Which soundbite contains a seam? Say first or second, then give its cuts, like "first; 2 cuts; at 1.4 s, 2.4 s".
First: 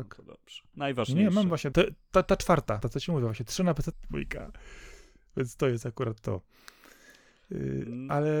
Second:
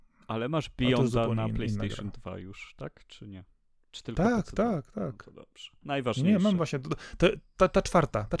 first; 3 cuts; at 1.7 s, 2.8 s, 3.9 s